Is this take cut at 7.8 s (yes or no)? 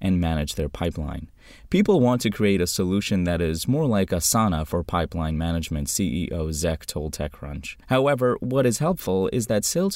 yes